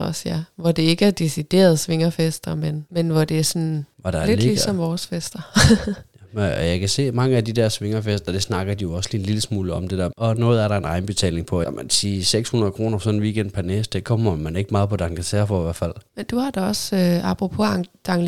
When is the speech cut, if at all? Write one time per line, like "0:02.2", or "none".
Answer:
0:10.1
0:11.6